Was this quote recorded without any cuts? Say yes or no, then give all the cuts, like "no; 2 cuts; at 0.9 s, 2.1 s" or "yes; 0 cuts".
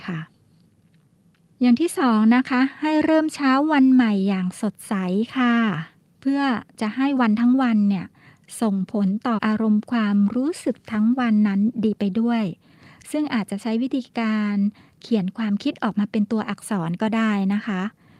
no; 1 cut; at 9.4 s